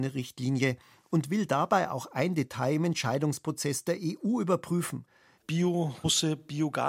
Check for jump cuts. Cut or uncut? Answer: cut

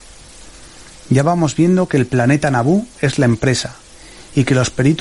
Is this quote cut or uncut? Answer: cut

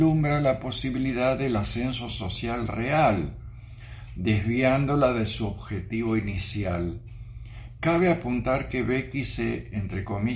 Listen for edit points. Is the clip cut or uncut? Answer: cut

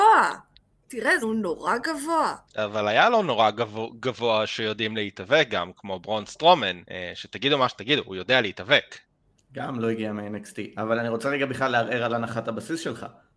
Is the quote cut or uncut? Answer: cut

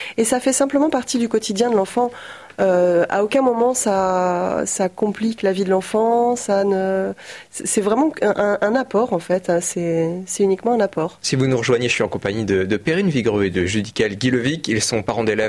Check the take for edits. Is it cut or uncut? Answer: uncut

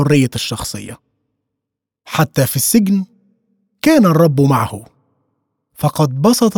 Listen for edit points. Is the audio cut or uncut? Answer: uncut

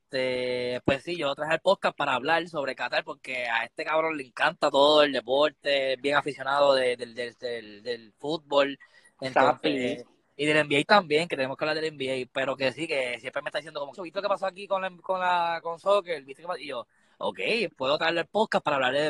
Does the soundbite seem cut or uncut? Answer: cut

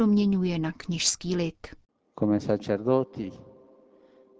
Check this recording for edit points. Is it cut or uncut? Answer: uncut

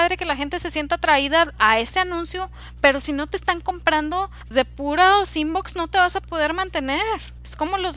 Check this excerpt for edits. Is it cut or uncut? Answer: cut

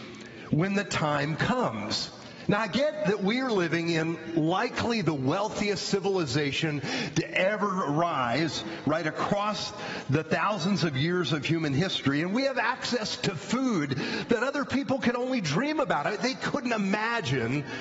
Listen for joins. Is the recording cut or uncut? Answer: uncut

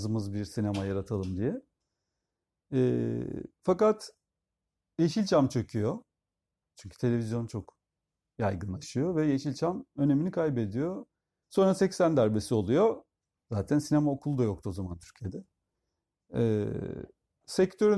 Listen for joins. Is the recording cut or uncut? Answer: cut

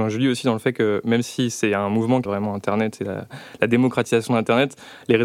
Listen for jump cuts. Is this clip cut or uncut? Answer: cut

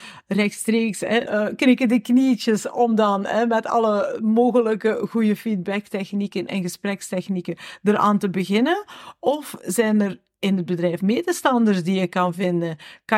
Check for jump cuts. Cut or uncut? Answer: cut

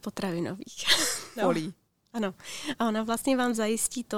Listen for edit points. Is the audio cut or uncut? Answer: cut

